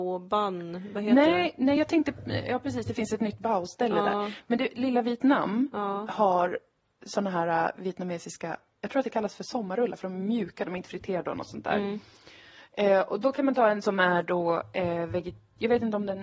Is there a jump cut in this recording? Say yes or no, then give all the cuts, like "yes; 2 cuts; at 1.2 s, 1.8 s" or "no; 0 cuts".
no; 0 cuts